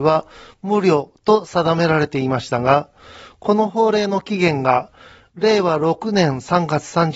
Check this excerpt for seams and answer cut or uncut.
uncut